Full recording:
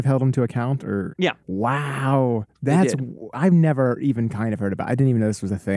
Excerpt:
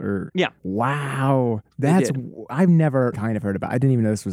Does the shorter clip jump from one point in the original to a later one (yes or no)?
yes